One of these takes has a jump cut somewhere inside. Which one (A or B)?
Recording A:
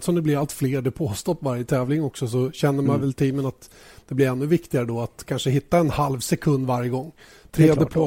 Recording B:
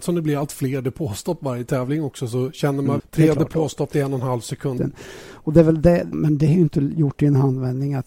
B